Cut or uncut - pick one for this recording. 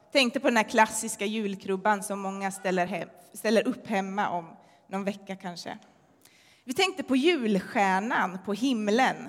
uncut